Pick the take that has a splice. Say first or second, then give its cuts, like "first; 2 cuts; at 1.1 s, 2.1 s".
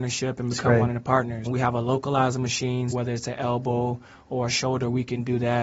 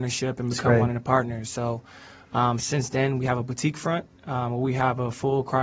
first; 2 cuts; at 1.5 s, 2.9 s